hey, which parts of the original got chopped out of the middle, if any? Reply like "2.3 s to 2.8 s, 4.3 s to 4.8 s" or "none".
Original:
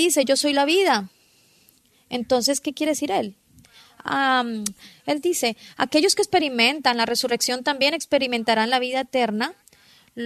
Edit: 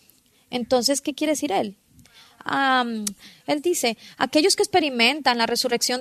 none